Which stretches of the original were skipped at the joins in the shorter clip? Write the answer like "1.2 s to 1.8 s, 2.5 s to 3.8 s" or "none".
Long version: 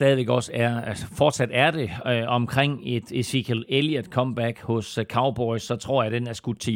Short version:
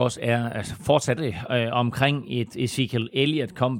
1.5 s to 1.7 s